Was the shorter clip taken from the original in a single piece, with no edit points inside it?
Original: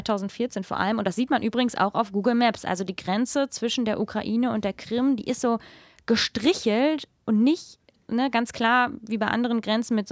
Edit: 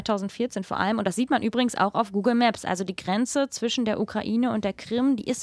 yes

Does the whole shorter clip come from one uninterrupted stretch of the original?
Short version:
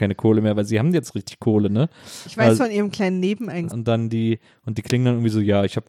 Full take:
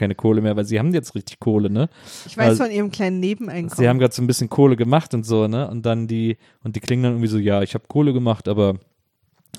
no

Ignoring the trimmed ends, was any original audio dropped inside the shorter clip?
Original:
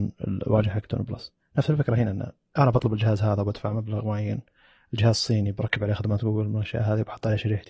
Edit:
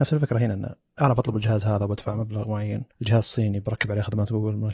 yes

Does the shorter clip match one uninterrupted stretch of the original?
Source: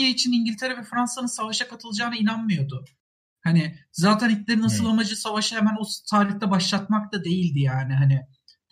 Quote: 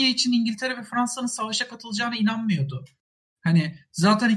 yes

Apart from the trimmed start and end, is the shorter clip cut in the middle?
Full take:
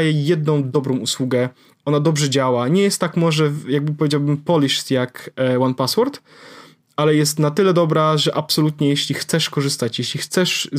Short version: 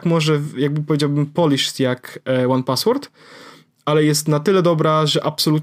no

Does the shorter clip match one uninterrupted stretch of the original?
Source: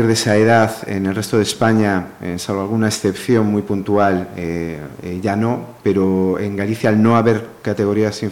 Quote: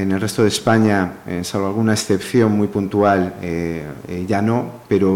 yes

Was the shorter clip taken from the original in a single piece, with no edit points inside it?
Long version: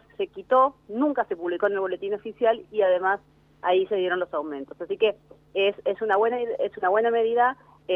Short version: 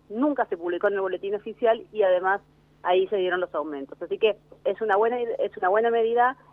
no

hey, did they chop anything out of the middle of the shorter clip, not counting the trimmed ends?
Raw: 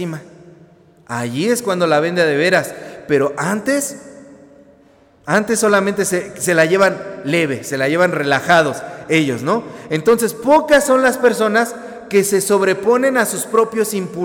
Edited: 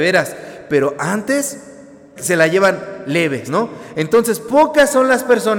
yes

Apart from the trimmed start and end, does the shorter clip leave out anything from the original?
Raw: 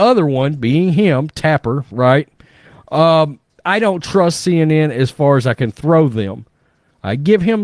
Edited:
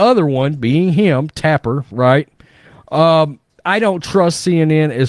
no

